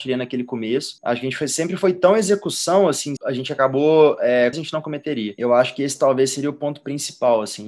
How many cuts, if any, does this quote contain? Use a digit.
2